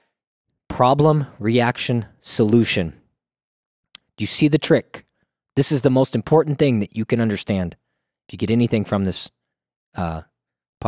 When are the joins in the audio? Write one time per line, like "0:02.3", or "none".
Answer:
0:04.0